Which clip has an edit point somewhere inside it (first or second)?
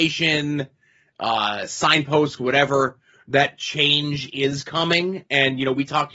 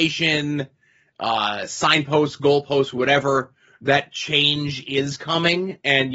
first